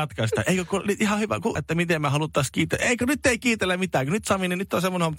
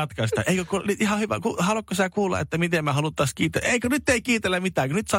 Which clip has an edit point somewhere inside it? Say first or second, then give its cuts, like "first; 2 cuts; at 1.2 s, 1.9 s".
first; 1 cut; at 1.6 s